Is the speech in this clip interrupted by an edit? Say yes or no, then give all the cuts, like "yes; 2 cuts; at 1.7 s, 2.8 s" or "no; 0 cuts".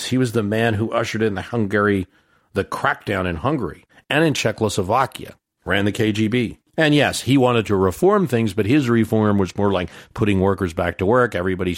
no; 0 cuts